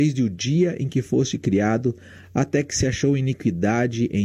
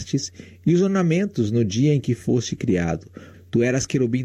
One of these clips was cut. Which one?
second; 1 cut; at 3.3 s

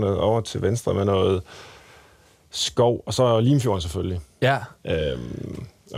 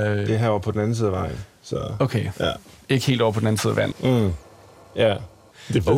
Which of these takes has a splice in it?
second; 1 cut; at 3.9 s

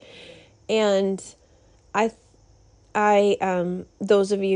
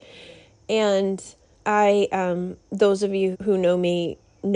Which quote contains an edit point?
second; 2 cuts; at 1.5 s, 3.3 s

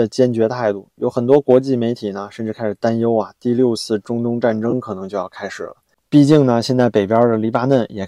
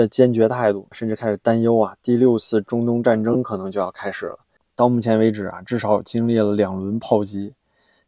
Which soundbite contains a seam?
second; 2 cuts; at 0.9 s, 4.7 s

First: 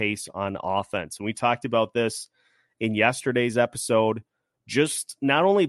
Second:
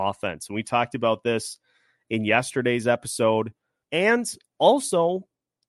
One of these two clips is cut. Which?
second; 1 cut; at 3.8 s

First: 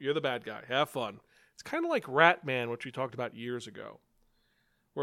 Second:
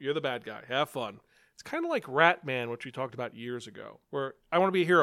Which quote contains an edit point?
second; 1 cut; at 4.0 s

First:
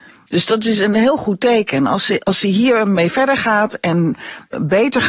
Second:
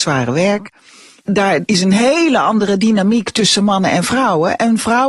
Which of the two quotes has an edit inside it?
second; 1 cut; at 1.2 s

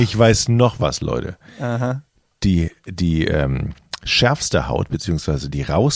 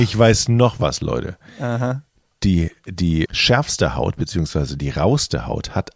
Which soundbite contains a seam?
second; 1 cut; at 3.3 s

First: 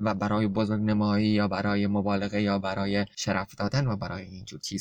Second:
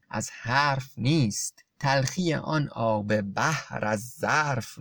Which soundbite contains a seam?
second; 1 cut; at 1.7 s

